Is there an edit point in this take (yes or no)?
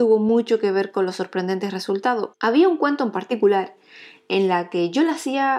yes